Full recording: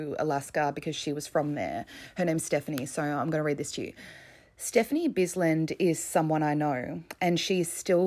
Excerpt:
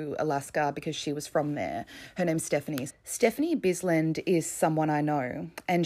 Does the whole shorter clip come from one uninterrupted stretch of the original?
no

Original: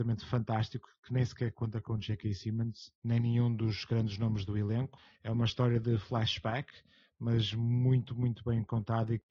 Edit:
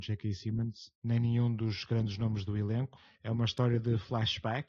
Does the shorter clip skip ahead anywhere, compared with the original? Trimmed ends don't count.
no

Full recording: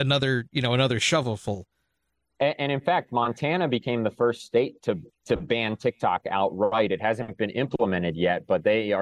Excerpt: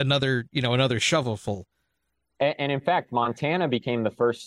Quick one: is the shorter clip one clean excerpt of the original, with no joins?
yes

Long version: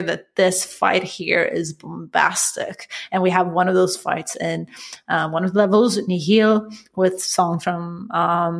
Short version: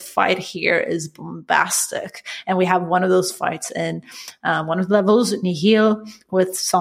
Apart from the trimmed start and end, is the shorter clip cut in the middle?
no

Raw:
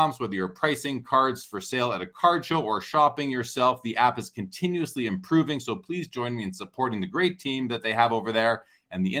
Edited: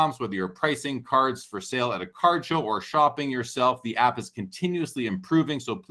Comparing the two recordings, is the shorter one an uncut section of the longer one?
yes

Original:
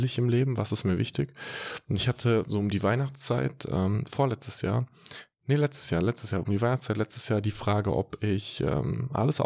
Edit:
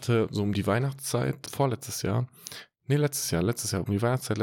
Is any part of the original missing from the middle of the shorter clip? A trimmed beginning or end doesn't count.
yes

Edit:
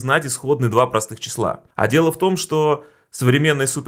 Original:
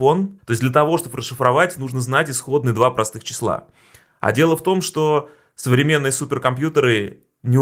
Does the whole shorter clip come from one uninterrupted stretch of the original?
no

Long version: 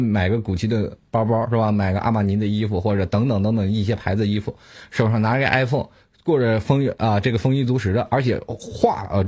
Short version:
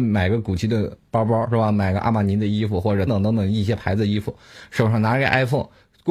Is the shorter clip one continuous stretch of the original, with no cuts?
no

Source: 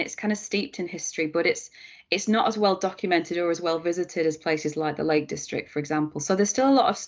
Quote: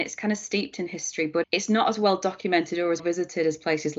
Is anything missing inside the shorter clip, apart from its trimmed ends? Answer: yes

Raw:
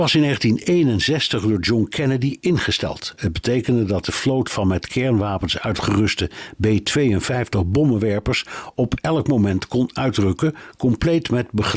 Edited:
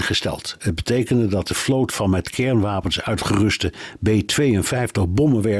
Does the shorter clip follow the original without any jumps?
yes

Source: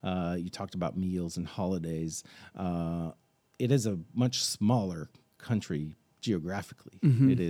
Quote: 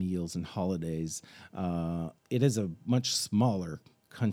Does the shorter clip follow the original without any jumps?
no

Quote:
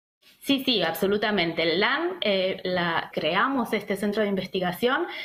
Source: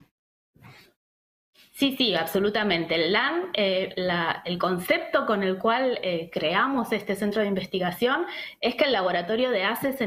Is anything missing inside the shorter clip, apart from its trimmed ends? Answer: yes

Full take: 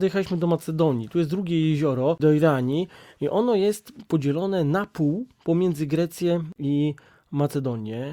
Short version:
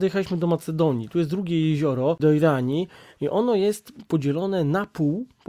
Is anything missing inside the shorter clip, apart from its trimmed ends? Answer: no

